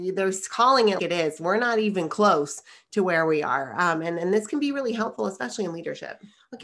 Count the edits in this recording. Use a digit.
1